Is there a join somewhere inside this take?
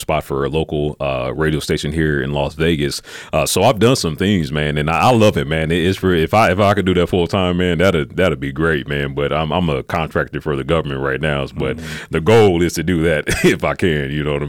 no; 0 cuts

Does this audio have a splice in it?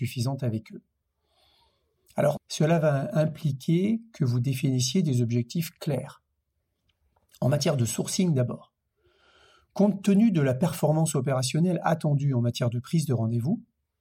yes; 1 cut; at 2.4 s

